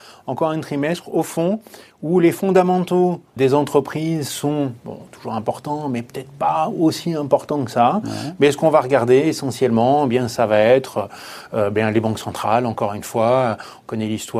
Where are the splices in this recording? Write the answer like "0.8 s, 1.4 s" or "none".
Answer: 3.4 s